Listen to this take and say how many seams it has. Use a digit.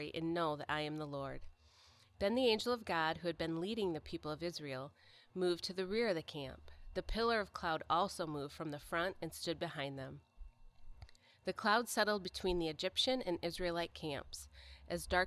0